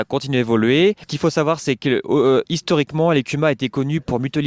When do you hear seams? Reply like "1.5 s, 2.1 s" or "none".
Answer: none